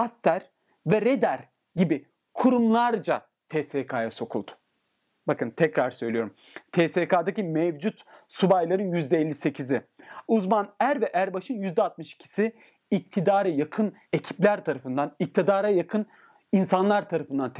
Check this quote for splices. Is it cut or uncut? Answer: cut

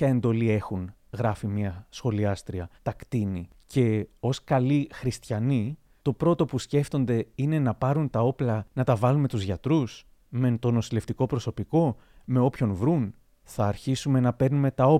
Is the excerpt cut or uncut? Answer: cut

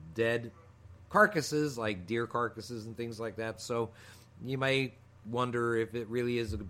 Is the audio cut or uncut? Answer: uncut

